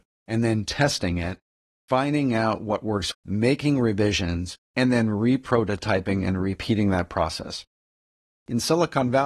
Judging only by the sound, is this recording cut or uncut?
cut